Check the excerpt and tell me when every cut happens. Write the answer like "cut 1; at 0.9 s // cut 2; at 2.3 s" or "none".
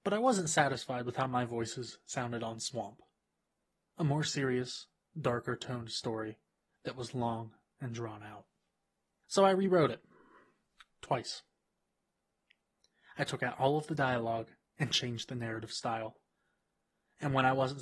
none